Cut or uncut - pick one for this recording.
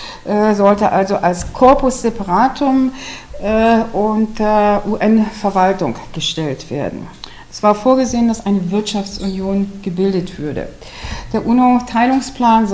uncut